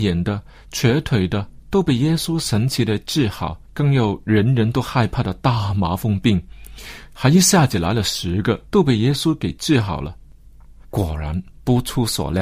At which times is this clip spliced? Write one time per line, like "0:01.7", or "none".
0:03.6
0:08.7
0:10.8